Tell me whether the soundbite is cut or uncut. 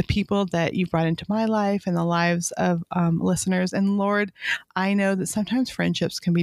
uncut